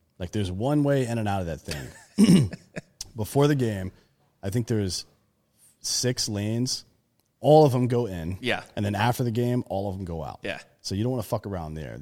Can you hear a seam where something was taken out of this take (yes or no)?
no